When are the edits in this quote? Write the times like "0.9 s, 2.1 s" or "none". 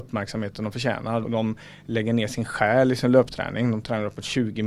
1.2 s